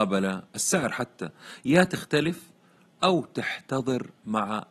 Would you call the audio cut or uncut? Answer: uncut